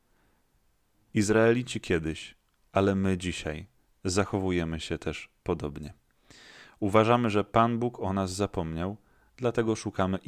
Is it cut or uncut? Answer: uncut